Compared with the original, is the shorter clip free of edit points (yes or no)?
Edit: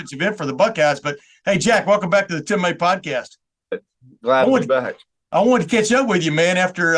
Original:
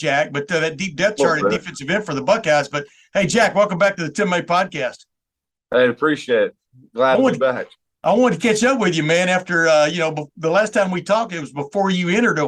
no